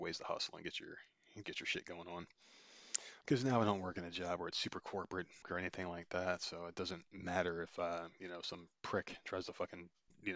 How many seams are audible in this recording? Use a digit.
3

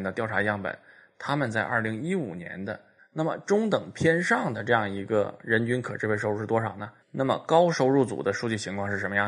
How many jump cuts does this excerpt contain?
2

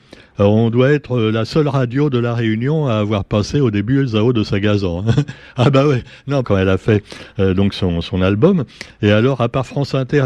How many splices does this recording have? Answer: 1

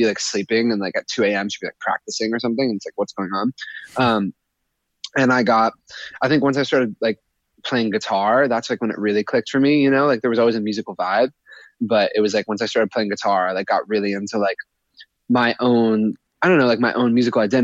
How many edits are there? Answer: 0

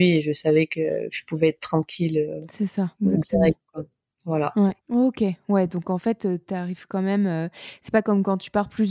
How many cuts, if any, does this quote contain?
2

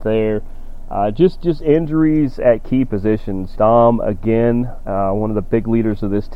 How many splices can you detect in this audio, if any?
1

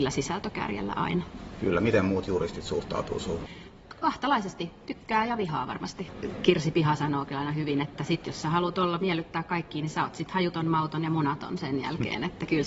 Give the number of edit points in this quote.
0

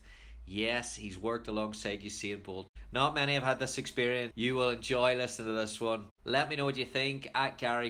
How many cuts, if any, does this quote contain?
1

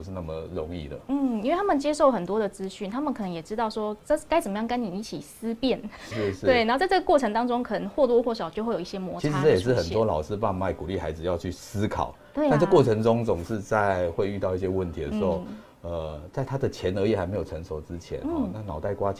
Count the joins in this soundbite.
1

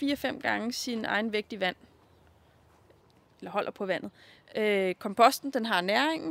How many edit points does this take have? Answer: 1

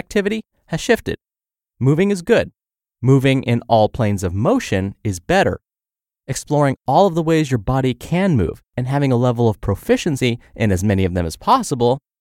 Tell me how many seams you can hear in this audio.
0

